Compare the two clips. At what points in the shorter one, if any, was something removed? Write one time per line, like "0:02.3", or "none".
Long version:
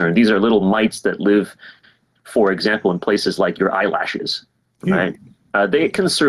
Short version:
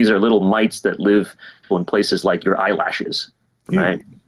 0:01.7